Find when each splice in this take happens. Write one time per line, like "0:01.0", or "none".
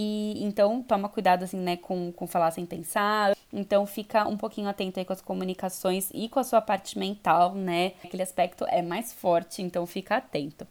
0:03.3
0:08.0

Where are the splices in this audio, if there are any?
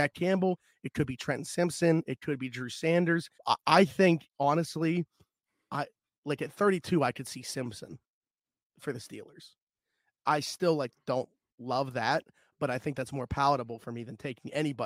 0:03.3

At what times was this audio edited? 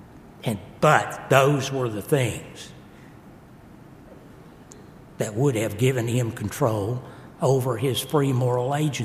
none

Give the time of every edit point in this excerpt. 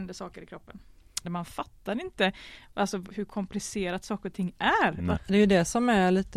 0:01.2
0:05.2

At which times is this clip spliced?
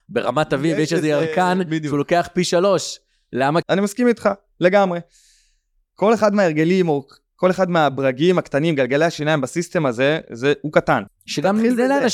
0:03.6
0:11.1

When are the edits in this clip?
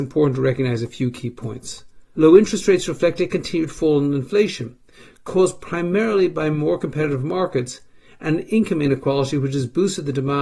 0:02.1

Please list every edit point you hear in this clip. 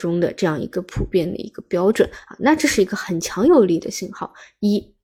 none

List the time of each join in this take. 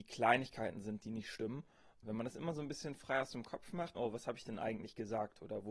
0:02.0
0:03.9

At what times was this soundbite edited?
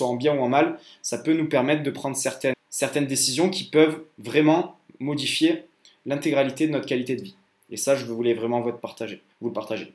0:02.5

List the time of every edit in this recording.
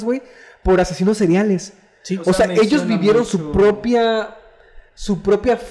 none

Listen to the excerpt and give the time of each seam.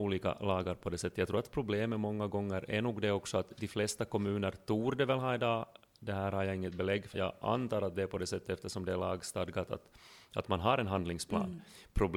0:07.1

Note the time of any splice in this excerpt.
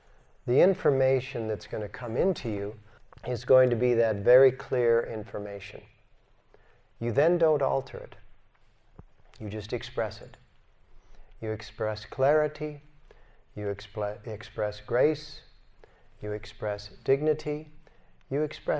none

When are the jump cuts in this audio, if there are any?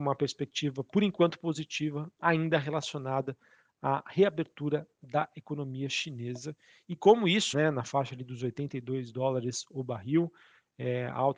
0:07.5

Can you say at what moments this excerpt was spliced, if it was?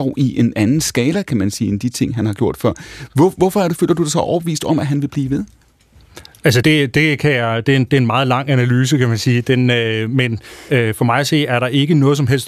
0:06.6

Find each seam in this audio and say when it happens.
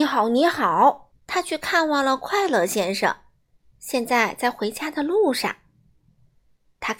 0:01.1
0:03.7

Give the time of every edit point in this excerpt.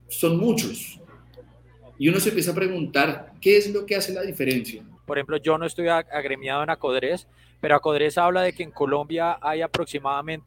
0:05.0

